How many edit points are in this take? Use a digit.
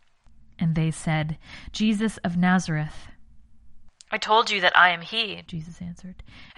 0